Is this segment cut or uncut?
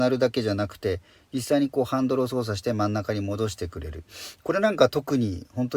uncut